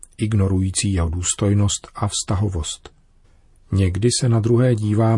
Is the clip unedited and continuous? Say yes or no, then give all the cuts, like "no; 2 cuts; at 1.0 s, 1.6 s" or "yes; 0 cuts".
yes; 0 cuts